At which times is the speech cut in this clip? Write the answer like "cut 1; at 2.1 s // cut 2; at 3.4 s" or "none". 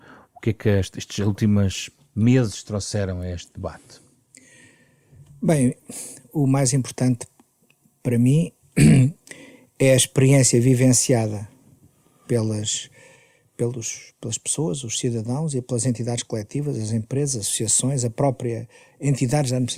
none